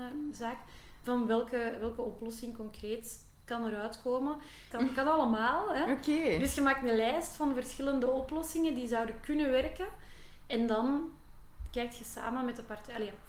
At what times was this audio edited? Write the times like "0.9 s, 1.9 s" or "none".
4.7 s

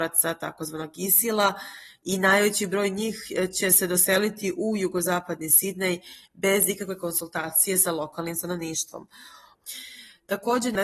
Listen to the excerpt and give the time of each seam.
9.5 s

